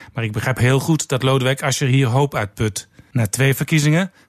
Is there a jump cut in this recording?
yes; 1 cut; at 3.1 s

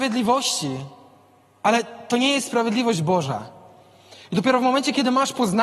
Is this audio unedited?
yes; 0 cuts

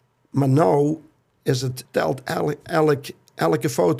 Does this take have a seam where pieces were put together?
yes; 1 cut; at 1.9 s

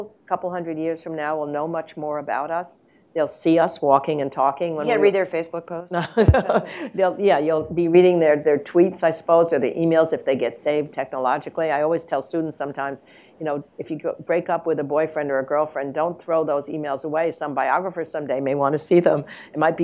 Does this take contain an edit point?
no; 0 cuts

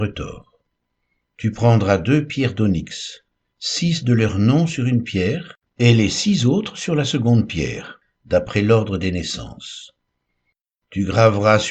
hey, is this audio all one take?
no; 2 cuts; at 3.5 s, 5.7 s

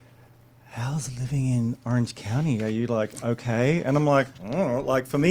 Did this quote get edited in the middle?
no; 0 cuts

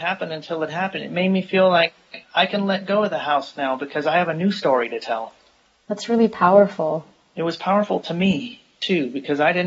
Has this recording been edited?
no; 0 cuts

